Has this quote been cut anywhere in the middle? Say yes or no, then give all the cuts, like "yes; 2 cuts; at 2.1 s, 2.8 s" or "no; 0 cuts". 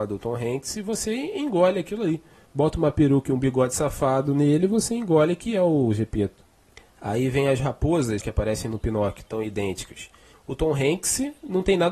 yes; 2 cuts; at 8.2 s, 10.3 s